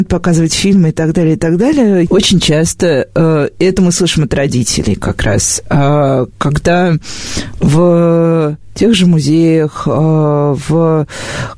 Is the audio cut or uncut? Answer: cut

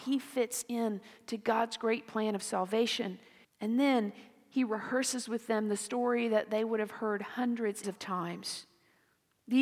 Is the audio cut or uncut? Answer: cut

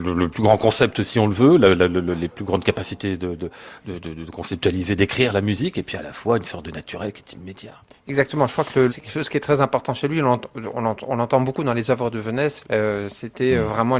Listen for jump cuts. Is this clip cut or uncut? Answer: cut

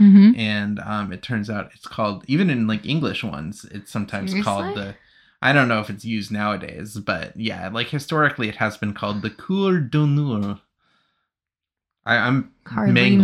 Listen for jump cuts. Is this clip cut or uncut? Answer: uncut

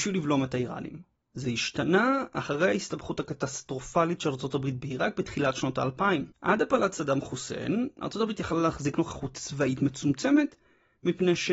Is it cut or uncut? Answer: cut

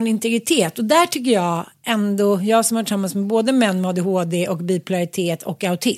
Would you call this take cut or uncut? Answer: uncut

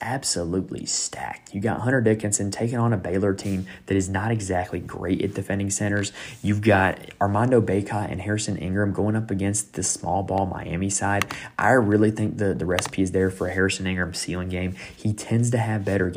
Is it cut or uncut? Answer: uncut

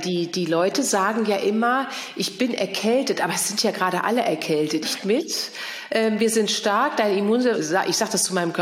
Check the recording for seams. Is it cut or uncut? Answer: cut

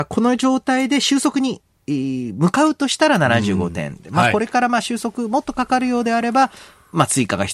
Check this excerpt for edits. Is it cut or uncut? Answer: uncut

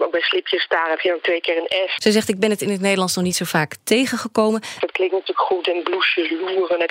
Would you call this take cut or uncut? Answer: cut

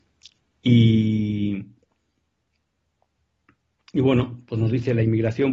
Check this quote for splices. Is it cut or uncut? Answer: uncut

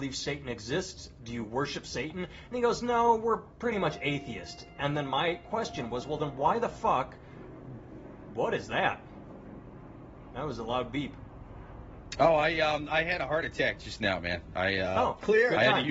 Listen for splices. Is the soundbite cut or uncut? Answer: uncut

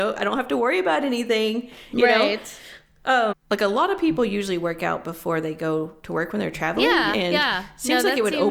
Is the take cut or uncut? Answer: cut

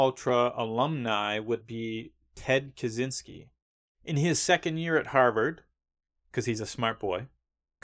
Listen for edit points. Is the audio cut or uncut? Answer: cut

